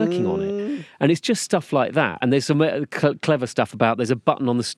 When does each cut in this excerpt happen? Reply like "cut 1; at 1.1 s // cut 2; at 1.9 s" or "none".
none